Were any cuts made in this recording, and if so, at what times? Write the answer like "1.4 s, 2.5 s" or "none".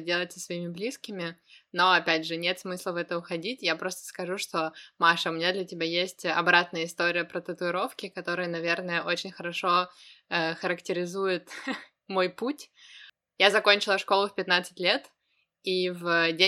none